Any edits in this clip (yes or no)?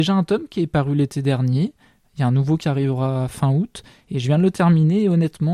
no